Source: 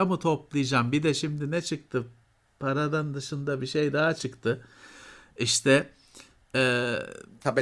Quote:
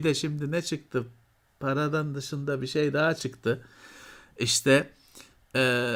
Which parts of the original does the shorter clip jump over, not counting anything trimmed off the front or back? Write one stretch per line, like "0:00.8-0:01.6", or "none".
none

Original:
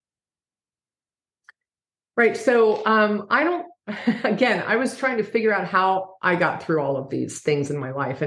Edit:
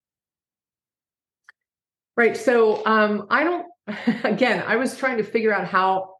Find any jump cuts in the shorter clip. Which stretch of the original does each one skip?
none

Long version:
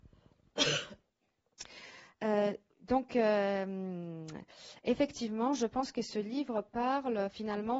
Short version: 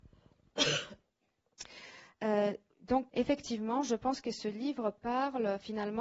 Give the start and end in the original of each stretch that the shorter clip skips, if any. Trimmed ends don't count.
0:03.1-0:04.8

